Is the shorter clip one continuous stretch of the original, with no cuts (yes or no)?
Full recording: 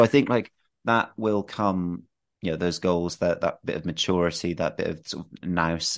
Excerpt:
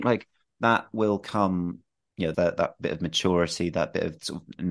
no